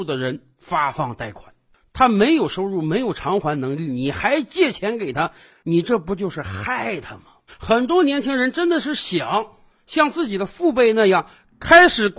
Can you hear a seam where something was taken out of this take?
yes; 1 cut; at 7.5 s

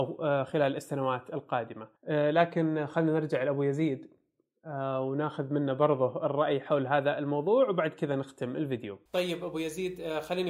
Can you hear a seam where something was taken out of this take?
yes; 2 cuts; at 2.0 s, 9.1 s

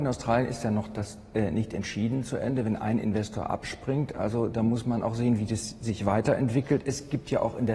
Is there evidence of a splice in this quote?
no; 0 cuts

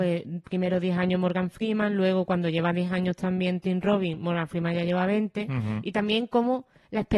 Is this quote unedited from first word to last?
yes; 0 cuts

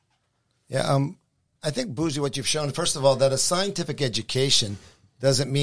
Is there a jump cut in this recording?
no; 0 cuts

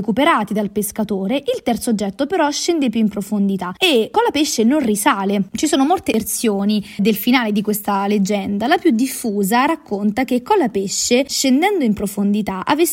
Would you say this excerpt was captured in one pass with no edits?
no; 1 cut; at 7.0 s

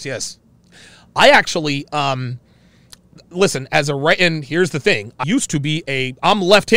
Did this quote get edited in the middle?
yes; 1 cut; at 5.2 s

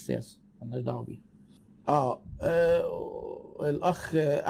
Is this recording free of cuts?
yes; 0 cuts

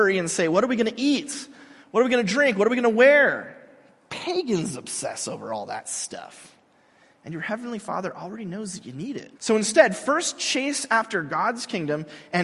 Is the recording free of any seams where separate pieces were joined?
no; 1 cut; at 9.4 s

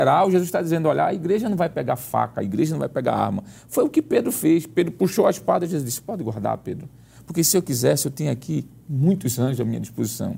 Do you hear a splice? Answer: no; 0 cuts

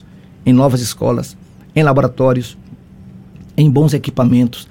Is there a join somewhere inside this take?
no; 0 cuts

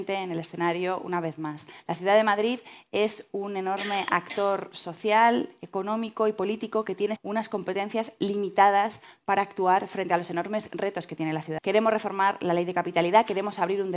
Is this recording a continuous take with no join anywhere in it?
no; 2 cuts; at 7.2 s, 11.6 s

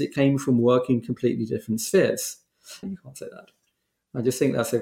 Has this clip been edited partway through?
yes; 1 cut; at 2.8 s

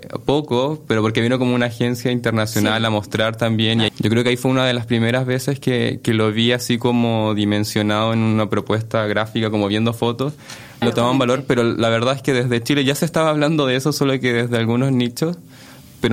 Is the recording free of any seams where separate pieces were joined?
no; 2 cuts; at 3.9 s, 10.8 s

